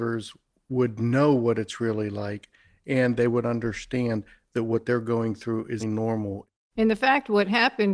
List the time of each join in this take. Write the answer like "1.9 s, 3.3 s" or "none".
5.8 s